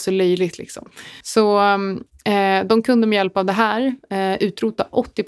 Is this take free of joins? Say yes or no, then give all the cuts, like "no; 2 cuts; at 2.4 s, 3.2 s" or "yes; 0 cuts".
yes; 0 cuts